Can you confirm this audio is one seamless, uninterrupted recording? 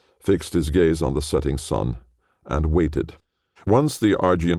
no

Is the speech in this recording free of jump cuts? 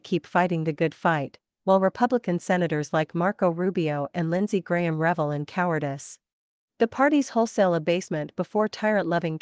no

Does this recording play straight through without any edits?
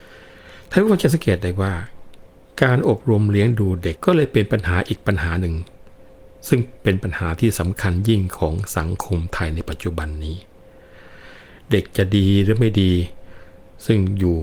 no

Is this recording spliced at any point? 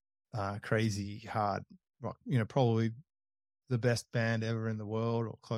no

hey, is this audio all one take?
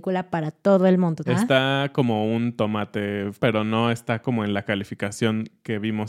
no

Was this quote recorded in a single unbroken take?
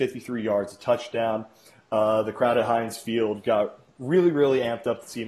yes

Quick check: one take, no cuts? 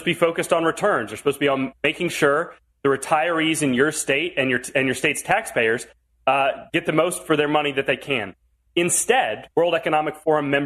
no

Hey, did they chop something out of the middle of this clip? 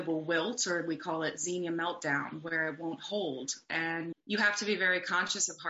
yes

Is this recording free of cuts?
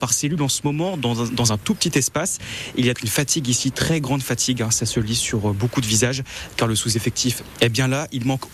no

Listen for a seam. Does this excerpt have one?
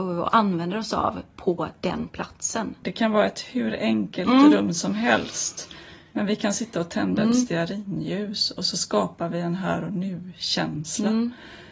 yes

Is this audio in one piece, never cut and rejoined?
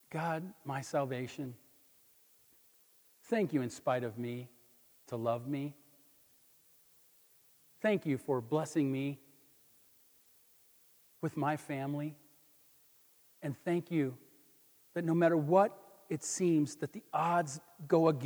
yes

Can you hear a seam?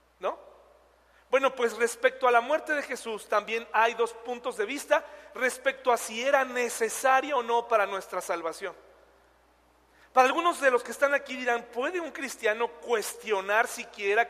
no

